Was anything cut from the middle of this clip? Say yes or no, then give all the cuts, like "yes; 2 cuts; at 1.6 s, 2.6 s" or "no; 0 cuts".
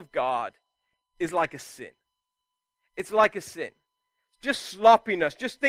no; 0 cuts